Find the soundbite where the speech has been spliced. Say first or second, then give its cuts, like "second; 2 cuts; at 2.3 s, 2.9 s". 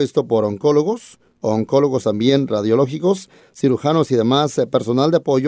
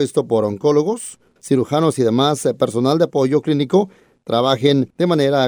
second; 1 cut; at 1.4 s